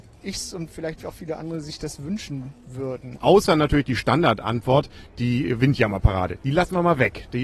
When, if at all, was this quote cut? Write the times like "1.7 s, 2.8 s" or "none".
3.2 s